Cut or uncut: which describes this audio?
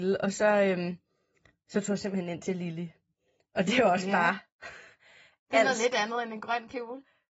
uncut